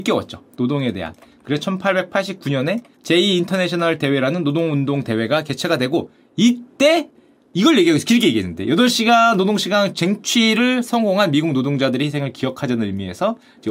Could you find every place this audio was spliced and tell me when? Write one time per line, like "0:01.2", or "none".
none